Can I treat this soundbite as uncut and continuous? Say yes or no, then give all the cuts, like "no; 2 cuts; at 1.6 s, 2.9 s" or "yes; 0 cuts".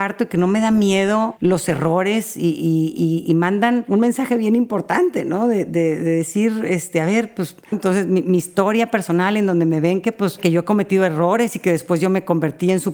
no; 1 cut; at 7.7 s